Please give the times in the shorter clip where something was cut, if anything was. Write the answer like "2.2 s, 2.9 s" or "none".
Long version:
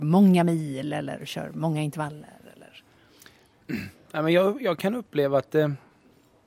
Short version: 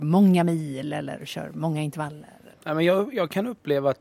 2.5 s